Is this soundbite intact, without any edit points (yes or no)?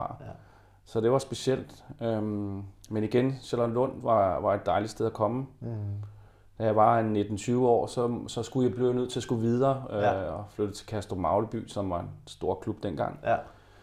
yes